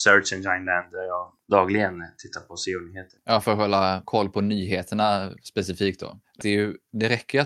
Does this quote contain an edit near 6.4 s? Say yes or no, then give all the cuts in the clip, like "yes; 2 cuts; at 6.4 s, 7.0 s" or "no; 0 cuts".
yes; 1 cut; at 6.4 s